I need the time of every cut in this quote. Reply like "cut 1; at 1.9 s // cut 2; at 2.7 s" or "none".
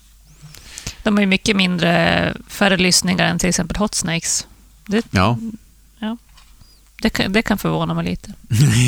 none